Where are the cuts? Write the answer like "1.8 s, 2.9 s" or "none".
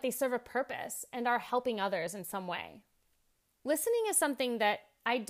3.4 s